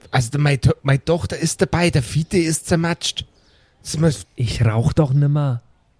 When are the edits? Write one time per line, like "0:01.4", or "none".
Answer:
0:04.2